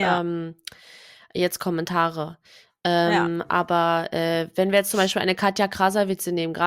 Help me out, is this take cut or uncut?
uncut